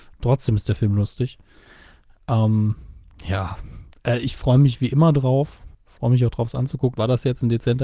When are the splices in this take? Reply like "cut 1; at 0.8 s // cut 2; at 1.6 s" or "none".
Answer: cut 1; at 5.7 s // cut 2; at 6.9 s